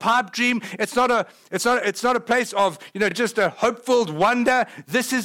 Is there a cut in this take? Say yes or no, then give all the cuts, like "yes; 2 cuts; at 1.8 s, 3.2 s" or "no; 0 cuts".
no; 0 cuts